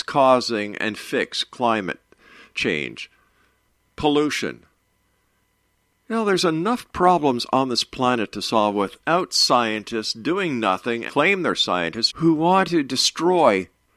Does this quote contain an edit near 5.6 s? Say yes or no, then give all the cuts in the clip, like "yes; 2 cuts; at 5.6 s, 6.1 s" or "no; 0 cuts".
no; 2 cuts; at 11.1 s, 12.1 s